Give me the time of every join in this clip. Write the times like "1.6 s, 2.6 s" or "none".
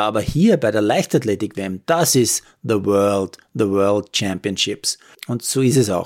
5.1 s